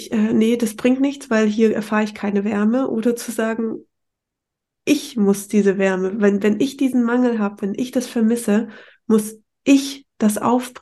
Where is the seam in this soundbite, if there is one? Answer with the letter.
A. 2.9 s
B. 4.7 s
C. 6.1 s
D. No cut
D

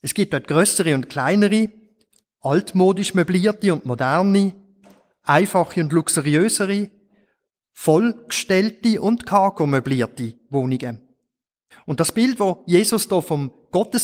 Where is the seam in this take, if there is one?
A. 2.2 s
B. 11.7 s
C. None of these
B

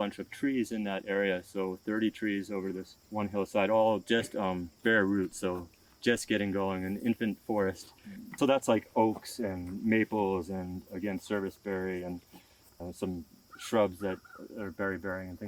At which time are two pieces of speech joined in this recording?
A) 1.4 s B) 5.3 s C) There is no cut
C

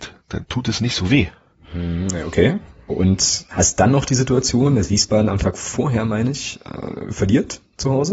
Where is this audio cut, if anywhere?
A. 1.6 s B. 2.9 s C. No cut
B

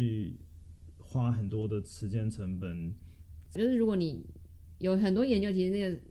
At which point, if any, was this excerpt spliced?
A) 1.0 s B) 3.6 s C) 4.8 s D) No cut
B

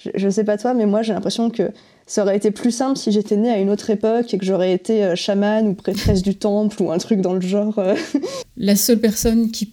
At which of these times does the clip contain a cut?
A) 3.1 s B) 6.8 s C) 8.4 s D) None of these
C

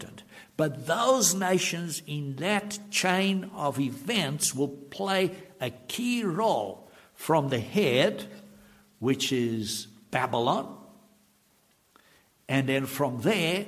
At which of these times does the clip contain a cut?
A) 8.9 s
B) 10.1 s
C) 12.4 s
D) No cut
B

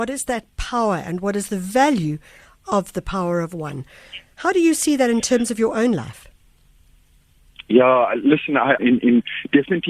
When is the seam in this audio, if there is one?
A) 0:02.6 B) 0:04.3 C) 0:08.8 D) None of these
C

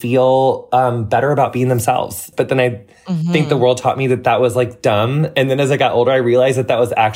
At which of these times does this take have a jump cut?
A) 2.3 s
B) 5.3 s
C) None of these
A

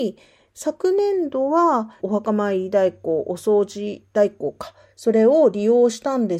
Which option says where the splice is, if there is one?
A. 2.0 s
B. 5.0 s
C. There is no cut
A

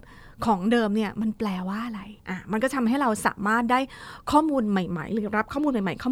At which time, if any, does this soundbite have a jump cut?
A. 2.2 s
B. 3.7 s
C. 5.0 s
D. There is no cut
A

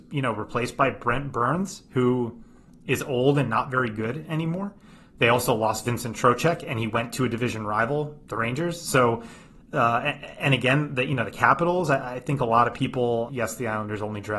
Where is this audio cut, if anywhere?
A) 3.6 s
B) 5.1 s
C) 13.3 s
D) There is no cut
C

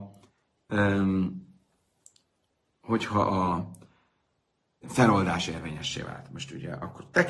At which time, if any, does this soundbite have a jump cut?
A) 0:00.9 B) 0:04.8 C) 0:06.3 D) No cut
B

